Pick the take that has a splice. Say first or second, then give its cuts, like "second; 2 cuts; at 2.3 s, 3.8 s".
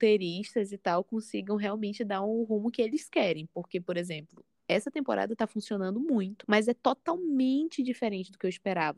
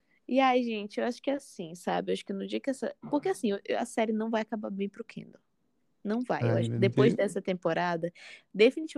first; 1 cut; at 6.4 s